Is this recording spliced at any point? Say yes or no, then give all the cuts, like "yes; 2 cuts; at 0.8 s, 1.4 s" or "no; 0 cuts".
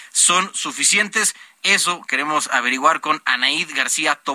no; 0 cuts